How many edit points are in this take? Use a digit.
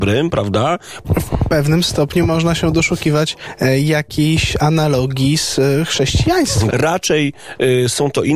2